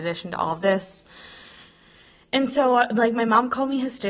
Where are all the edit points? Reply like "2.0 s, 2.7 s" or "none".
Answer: none